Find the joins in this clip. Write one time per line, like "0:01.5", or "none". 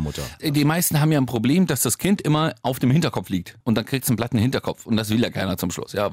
none